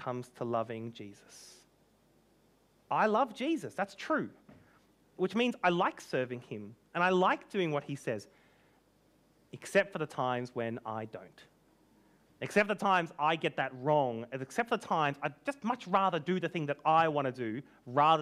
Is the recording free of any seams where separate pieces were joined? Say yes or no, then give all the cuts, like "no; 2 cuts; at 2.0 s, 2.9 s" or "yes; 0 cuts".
yes; 0 cuts